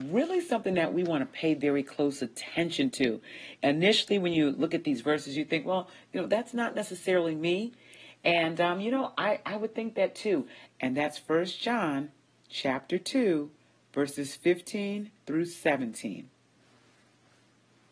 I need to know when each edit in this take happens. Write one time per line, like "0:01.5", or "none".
0:10.7
0:15.2